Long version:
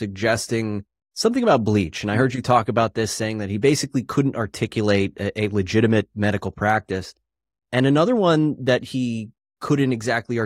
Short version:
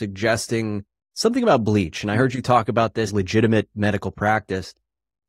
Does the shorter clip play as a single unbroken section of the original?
no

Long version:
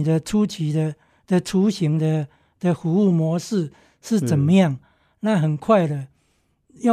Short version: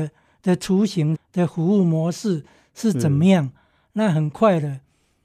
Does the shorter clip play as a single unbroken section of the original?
no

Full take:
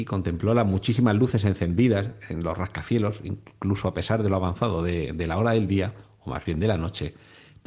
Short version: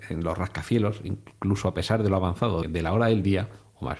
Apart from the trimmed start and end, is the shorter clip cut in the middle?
yes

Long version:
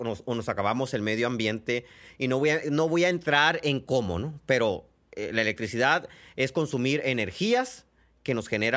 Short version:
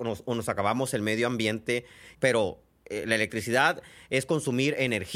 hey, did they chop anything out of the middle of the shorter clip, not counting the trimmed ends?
yes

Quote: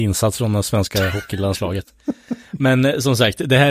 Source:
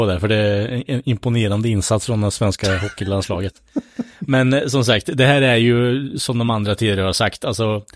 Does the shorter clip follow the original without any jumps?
yes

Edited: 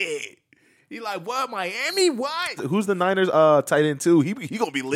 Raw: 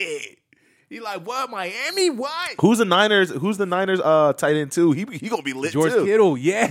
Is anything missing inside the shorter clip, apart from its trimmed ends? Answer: yes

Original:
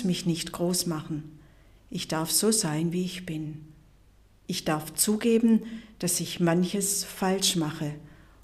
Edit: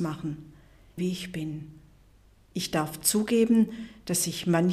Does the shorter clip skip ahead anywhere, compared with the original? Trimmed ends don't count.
yes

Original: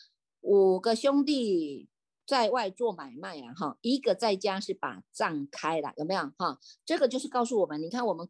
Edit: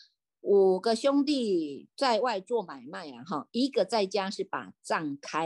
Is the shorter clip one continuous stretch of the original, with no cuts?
no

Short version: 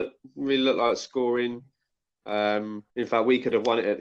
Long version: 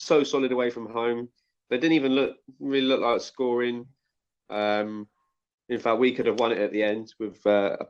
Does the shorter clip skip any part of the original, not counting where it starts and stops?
yes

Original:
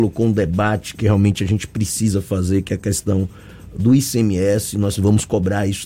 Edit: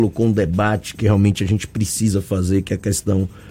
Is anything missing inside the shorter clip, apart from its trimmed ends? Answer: no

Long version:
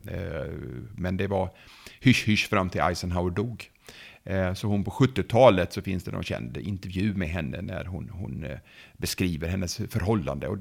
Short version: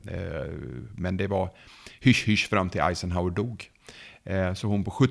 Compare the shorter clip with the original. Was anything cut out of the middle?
no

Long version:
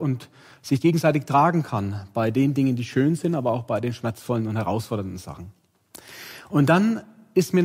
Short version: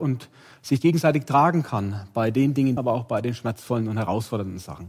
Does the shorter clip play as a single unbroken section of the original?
no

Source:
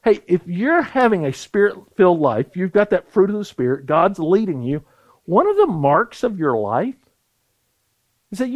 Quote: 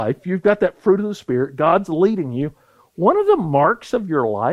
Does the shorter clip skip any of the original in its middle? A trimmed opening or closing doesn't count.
no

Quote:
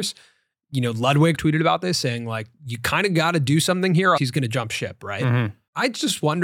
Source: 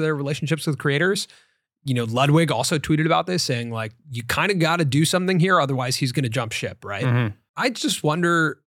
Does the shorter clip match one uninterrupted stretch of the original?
no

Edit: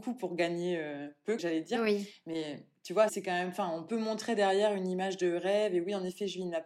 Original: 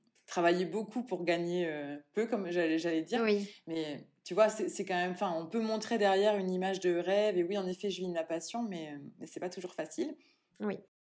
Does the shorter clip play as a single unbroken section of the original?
no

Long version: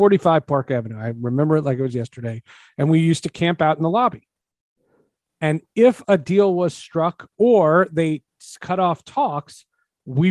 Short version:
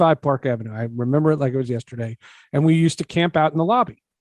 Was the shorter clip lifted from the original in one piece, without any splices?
yes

